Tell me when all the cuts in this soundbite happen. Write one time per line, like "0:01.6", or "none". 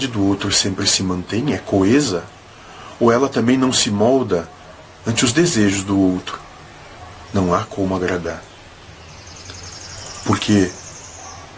0:07.3